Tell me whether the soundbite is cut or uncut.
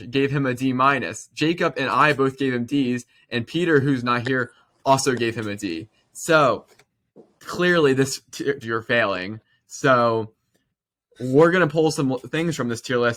cut